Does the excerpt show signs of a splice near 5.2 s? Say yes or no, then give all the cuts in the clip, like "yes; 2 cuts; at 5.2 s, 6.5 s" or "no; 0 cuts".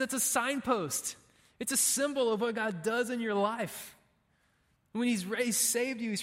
no; 0 cuts